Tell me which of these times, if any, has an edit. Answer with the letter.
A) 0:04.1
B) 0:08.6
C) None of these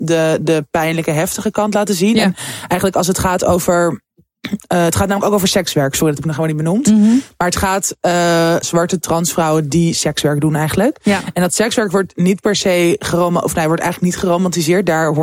B